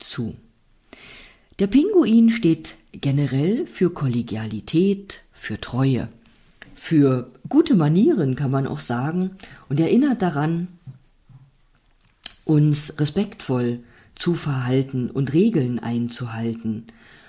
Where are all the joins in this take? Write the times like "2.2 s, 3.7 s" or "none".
6.7 s

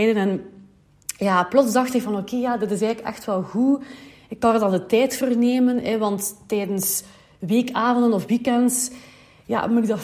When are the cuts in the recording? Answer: none

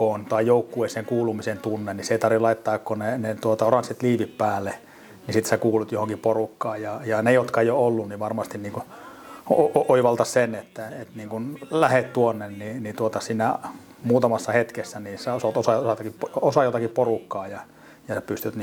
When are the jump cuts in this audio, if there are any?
none

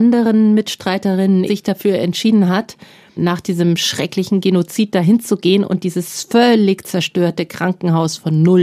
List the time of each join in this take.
1.5 s, 3.2 s

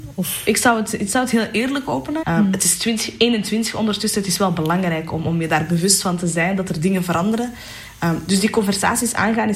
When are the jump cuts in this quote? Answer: 2.2 s

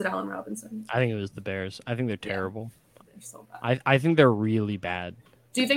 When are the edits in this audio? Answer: 3.0 s

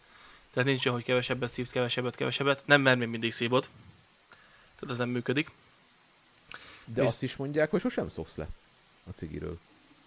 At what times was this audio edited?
none

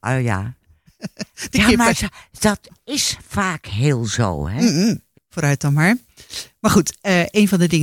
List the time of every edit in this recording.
5.1 s

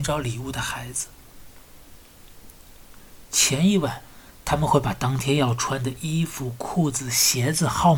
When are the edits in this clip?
none

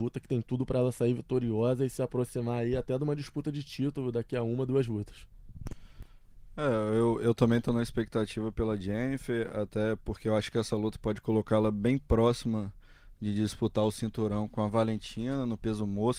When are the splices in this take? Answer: 14.5 s

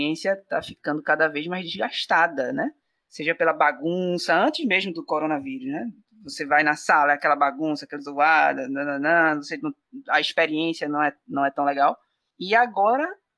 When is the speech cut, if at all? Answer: none

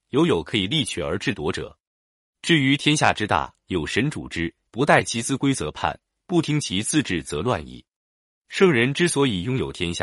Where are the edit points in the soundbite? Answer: none

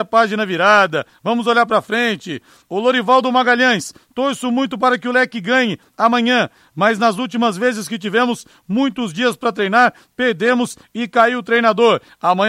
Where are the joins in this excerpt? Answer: none

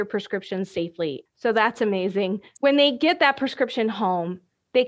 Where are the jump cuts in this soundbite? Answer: 1.3 s, 2.6 s

